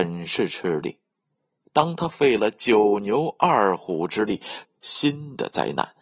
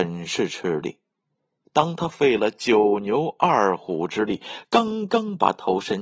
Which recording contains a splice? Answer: first; 1 cut; at 4.6 s

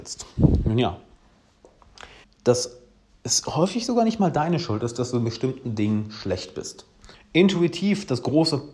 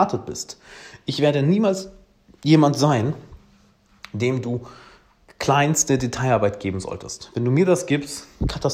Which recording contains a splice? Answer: first; 2 cuts; at 2.2 s, 7.1 s

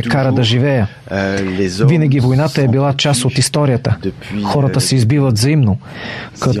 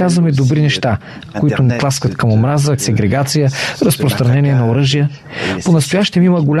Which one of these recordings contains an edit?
second; 2 cuts; at 1.3 s, 2.8 s

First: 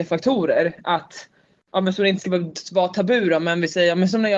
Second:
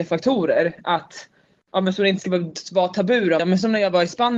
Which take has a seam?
second; 1 cut; at 3.4 s

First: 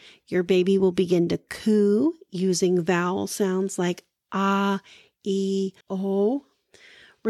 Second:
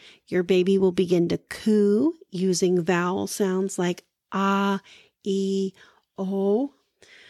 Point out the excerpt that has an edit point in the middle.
first; 1 cut; at 5.8 s

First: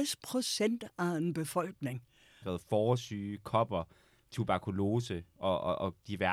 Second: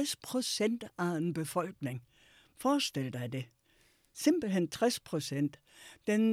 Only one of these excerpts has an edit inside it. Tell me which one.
first; 1 cut; at 2.4 s

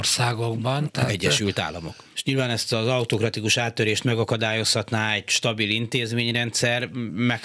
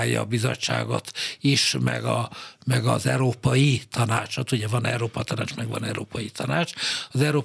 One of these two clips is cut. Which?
first; 1 cut; at 2.1 s

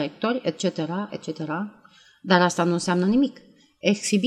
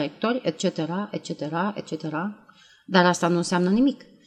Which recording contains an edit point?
first; 1 cut; at 1.1 s

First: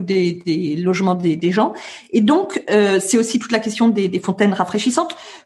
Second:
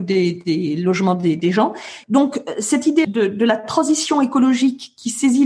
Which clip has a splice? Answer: second; 2 cuts; at 2.0 s, 3.0 s

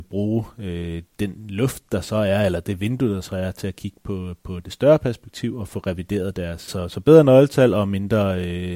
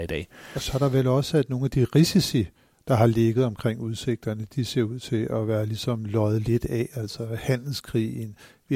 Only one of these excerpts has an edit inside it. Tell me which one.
first; 2 cuts; at 1.1 s, 6.7 s

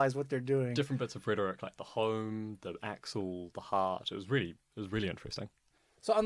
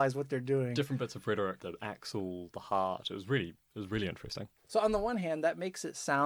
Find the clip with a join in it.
second; 2 cuts; at 1.6 s, 4.6 s

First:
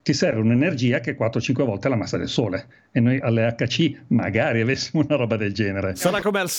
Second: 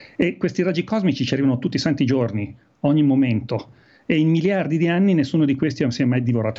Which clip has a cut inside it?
first; 1 cut; at 3.2 s

